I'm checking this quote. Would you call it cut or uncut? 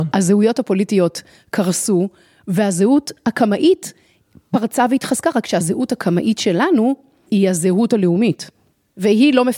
uncut